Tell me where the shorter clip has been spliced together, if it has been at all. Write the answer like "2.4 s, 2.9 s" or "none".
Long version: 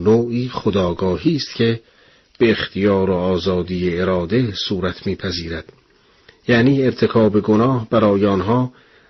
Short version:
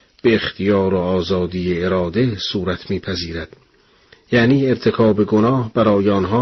none